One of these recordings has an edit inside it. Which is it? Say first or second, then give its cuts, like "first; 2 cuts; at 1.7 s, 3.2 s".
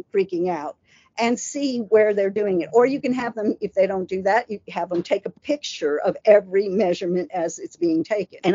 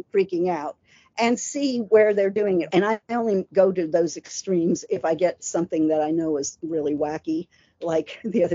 second; 1 cut; at 2.7 s